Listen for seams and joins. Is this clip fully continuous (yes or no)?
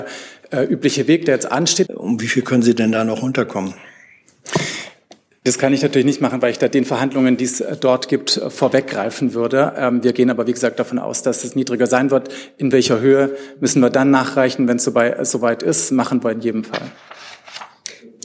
no